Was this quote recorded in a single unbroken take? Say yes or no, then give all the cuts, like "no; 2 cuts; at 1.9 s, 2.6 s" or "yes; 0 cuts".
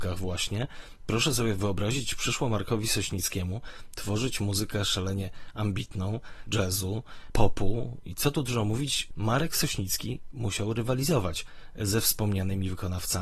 no; 1 cut; at 6.5 s